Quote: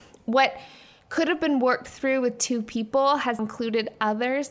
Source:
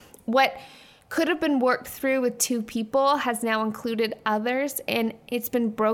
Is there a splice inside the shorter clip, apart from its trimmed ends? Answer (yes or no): yes